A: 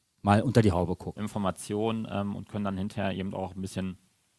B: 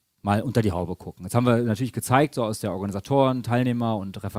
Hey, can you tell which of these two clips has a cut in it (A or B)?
A